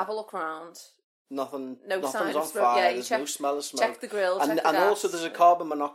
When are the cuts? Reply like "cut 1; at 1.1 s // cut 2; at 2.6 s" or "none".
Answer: none